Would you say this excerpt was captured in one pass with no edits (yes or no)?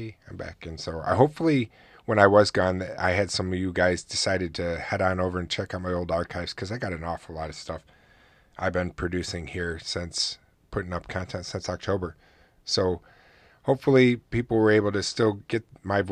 yes